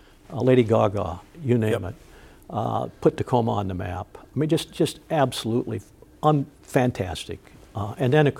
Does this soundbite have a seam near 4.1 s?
no; 0 cuts

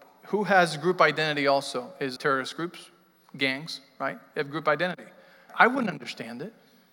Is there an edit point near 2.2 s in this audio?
yes; 2 cuts; at 2.2 s, 5.5 s

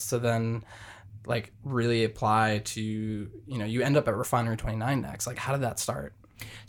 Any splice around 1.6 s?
yes; 1 cut; at 1.6 s

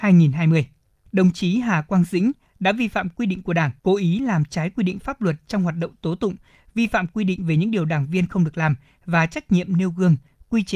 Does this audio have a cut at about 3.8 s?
yes; 2 cuts; at 1.0 s, 3.8 s

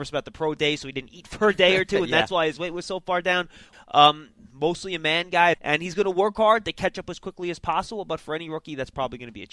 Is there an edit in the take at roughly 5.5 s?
yes; 2 cuts; at 3.7 s, 5.5 s

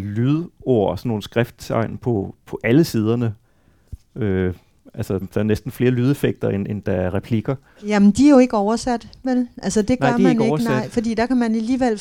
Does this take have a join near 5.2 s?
yes; 1 cut; at 5.2 s

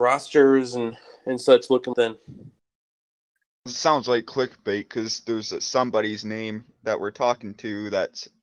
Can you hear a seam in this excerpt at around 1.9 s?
yes; 1 cut; at 1.9 s

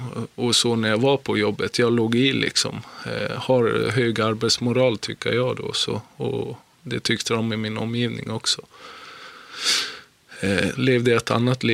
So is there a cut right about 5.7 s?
no; 1 cut; at 10.7 s

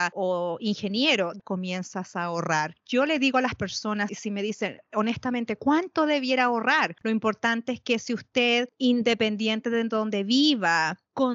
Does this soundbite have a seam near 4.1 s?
yes; 3 cuts; at 1.4 s, 4.1 s, 7.0 s

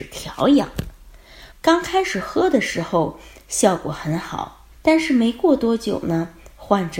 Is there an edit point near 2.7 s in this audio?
no; 2 cuts; at 1.5 s, 4.7 s

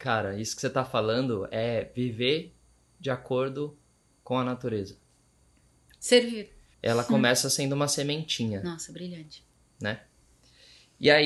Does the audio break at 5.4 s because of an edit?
no; 1 cut; at 6.7 s

